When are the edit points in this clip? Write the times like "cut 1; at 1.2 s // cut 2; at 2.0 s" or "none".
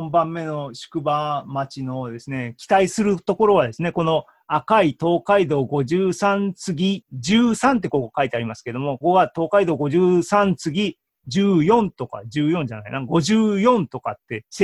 cut 1; at 9.0 s